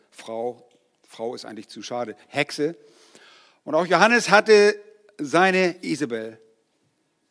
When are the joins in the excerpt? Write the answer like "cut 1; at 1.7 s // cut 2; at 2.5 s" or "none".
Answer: none